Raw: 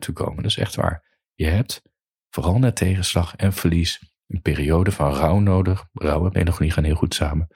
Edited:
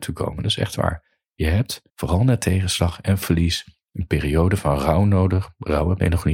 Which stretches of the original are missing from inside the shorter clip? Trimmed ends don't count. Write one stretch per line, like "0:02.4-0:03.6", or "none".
0:01.9-0:02.2